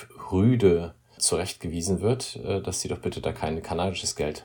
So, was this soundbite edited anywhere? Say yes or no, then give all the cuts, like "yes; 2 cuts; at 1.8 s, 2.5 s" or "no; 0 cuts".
yes; 1 cut; at 1.2 s